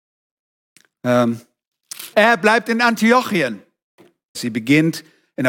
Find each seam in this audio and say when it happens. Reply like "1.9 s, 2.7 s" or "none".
2.1 s, 4.3 s